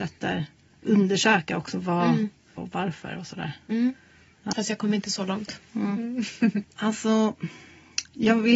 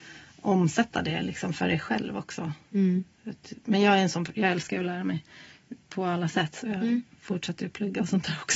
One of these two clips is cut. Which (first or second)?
first